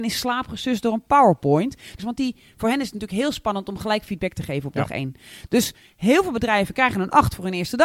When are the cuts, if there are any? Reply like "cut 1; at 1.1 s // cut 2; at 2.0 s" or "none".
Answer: cut 1; at 2.0 s